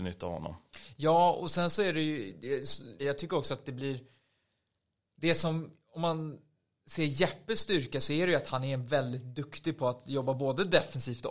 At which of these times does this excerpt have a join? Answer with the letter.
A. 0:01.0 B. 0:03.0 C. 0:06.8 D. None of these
B